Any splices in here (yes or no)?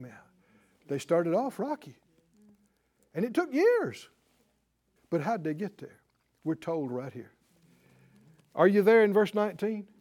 yes